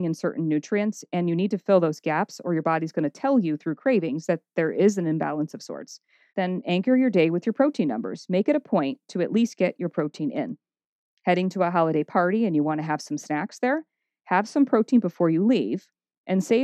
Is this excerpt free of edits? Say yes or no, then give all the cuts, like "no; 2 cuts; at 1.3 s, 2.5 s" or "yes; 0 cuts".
no; 1 cut; at 6.3 s